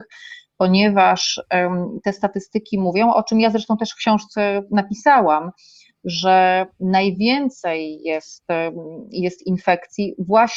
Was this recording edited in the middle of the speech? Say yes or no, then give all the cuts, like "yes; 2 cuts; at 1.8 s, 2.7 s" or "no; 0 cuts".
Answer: no; 0 cuts